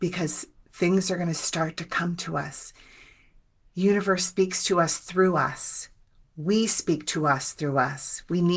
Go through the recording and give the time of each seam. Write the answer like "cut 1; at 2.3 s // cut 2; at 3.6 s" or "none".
none